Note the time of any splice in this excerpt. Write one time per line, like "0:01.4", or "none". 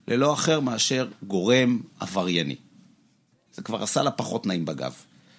0:03.5